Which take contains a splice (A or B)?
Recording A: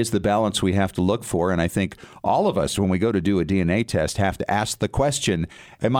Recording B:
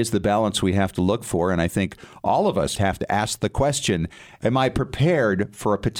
B